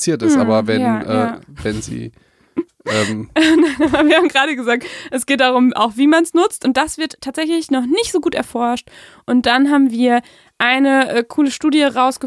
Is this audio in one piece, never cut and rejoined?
yes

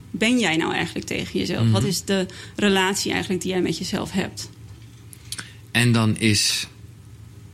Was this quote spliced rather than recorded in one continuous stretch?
no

